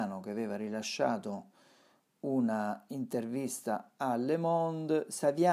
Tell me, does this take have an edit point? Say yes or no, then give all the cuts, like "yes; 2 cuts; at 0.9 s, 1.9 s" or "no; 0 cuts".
no; 0 cuts